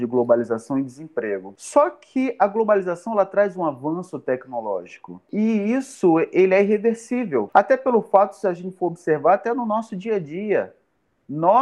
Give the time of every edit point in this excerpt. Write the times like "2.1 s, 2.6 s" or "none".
7.5 s